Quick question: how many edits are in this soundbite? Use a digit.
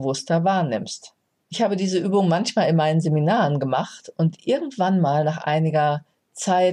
0